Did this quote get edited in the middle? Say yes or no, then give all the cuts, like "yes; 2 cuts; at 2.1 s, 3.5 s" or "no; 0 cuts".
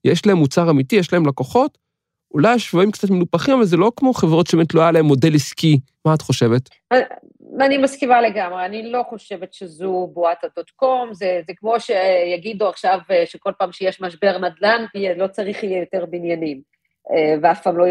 yes; 2 cuts; at 5.9 s, 14.9 s